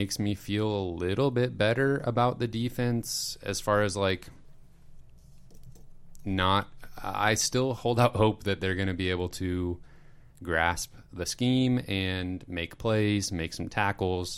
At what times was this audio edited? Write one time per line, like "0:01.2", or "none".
none